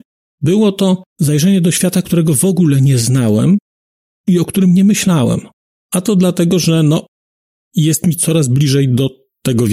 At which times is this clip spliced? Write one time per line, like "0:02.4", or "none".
0:01.1
0:05.7